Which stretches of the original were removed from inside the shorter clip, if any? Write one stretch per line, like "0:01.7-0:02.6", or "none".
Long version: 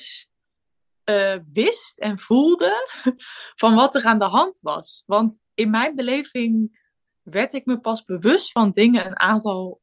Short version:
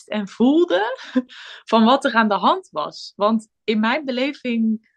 none